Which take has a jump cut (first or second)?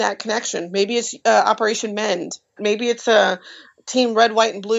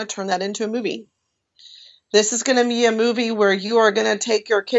first